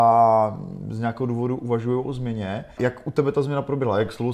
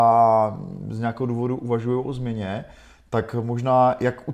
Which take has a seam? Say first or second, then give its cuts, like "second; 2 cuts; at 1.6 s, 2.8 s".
first; 1 cut; at 2.8 s